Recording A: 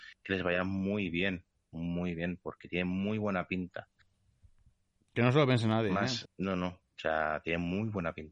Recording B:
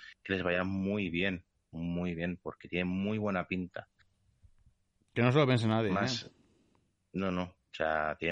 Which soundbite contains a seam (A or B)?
A